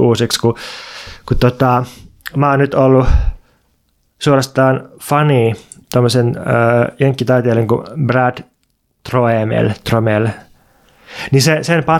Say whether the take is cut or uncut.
uncut